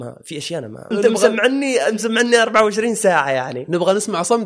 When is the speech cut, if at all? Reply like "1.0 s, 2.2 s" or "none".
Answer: 0.9 s